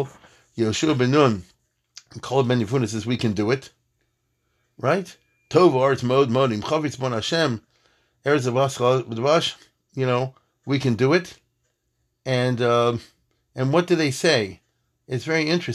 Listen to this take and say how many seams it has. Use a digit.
0